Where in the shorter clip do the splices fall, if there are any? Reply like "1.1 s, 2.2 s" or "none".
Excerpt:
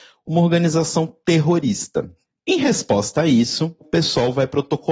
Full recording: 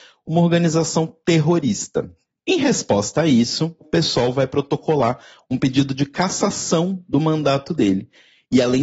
none